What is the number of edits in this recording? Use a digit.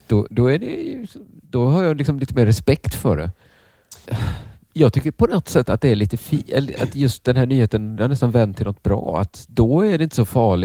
1